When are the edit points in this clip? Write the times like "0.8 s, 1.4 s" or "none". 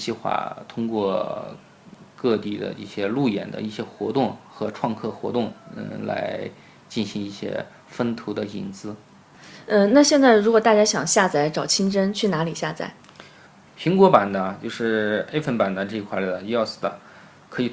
none